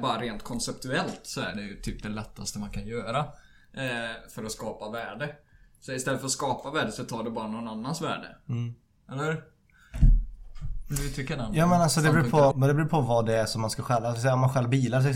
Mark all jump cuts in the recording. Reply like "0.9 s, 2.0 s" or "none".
12.5 s